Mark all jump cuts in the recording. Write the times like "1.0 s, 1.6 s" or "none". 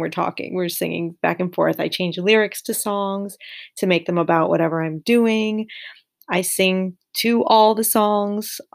none